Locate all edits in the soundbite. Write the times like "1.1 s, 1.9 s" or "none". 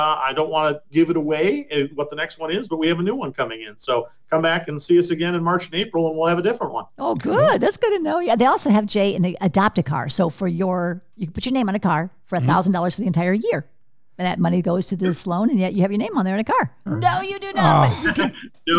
16.9 s